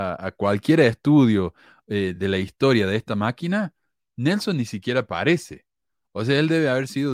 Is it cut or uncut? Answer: uncut